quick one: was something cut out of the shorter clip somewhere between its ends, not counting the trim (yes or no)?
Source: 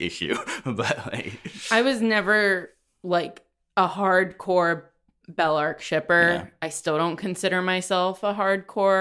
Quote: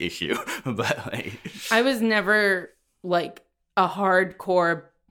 no